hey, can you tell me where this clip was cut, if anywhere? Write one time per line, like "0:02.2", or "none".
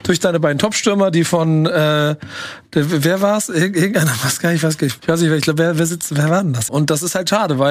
0:05.0
0:06.7